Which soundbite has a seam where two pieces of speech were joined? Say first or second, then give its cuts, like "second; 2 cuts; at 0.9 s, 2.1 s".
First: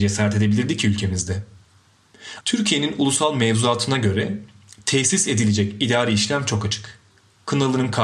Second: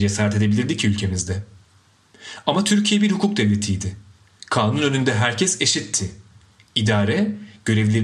first; 1 cut; at 2.4 s